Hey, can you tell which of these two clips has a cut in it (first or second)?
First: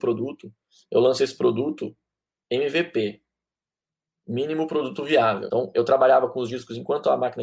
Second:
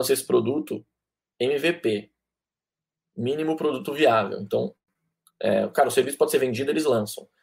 first